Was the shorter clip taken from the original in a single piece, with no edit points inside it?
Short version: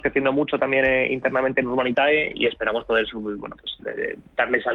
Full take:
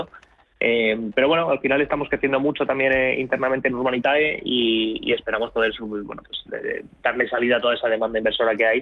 no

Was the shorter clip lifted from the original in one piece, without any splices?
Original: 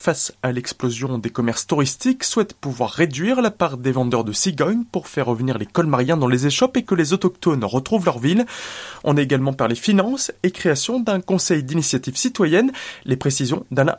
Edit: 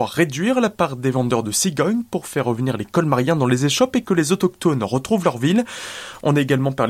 yes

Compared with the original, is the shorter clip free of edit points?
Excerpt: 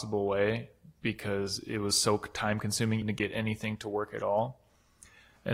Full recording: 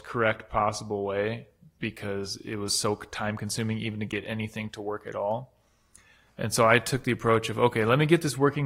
no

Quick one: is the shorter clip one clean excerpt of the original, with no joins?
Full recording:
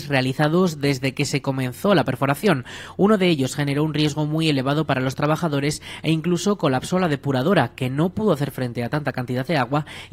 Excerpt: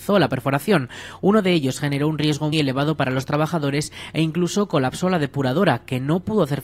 no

